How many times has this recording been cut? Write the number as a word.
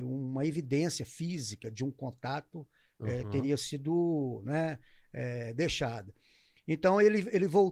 zero